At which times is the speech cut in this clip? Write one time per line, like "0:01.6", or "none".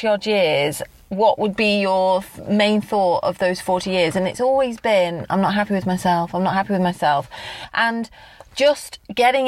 none